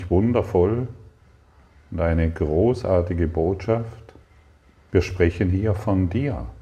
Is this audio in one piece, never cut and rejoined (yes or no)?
no